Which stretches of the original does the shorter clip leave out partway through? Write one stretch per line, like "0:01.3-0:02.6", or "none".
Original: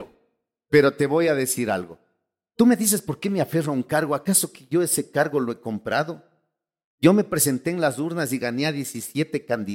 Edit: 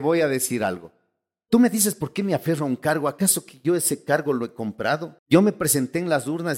0:06.3-0:06.9